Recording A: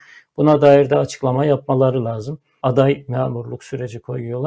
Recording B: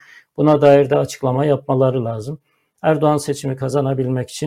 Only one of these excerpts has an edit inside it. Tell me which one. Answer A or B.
A